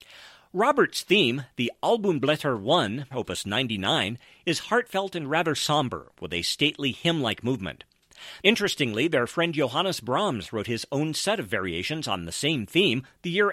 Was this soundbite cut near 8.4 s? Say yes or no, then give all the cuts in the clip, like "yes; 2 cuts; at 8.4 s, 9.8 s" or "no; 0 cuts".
yes; 2 cuts; at 3.1 s, 8.4 s